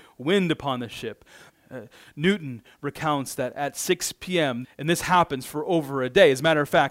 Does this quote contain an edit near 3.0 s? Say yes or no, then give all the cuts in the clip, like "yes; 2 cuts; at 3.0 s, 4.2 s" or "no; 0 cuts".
no; 2 cuts; at 1.5 s, 4.6 s